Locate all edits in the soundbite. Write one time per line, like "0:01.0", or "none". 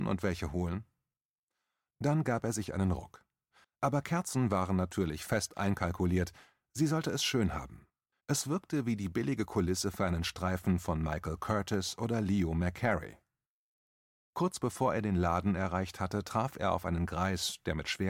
0:03.6
0:08.1